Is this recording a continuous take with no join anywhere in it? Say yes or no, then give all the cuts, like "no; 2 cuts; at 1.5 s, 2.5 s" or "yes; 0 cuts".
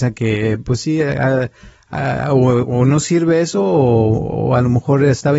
yes; 0 cuts